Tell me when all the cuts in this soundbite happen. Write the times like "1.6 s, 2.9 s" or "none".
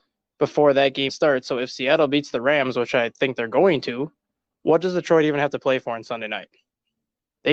1.1 s